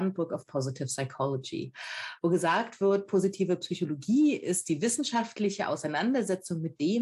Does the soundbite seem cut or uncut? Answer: uncut